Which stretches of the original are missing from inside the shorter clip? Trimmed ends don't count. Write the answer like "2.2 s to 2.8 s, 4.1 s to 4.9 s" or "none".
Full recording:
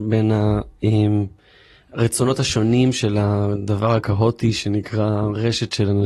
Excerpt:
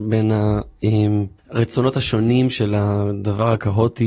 1.4 s to 1.8 s